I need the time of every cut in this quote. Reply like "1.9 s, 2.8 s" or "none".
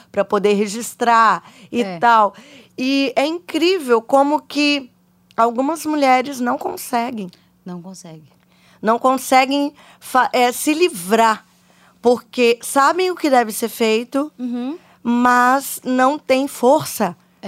none